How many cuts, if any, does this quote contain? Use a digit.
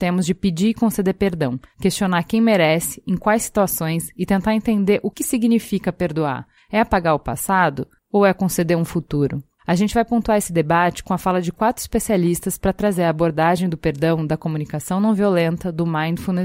1